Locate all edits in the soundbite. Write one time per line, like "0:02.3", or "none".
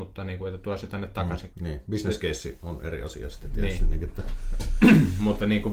0:01.5